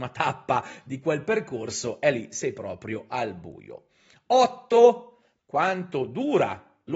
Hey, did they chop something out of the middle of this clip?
yes; 1 cut; at 5.4 s

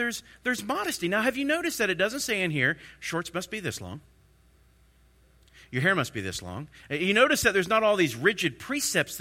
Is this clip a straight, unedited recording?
yes; 0 cuts

